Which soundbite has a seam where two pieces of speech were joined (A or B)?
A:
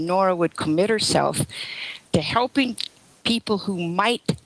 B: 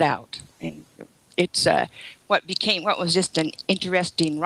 A